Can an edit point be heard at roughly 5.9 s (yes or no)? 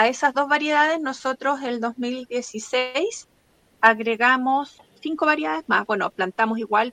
no